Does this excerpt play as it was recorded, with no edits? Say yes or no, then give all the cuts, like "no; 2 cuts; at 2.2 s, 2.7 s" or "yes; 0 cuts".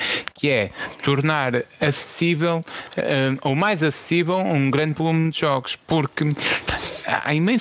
yes; 0 cuts